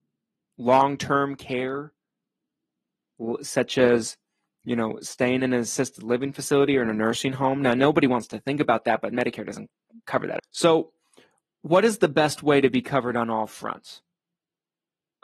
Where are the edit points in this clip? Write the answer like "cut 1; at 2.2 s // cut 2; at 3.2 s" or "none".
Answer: cut 1; at 10.4 s

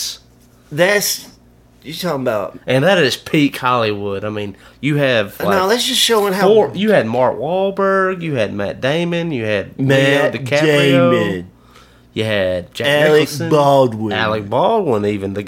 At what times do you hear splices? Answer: none

